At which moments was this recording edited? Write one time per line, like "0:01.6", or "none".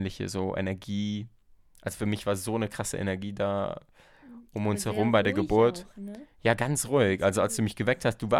none